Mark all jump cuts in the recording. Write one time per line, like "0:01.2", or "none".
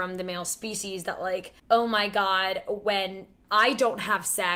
0:01.6